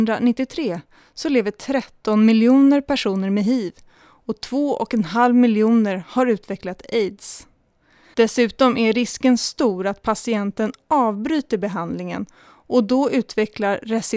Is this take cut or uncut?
cut